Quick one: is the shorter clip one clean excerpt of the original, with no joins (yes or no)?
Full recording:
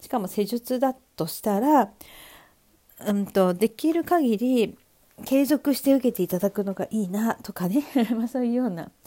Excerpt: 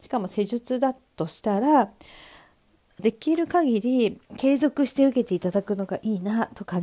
no